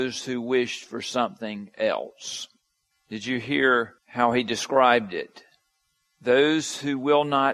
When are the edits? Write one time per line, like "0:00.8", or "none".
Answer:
0:02.9
0:04.0